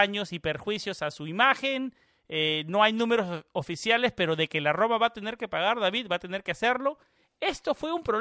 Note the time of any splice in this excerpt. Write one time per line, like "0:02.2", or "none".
none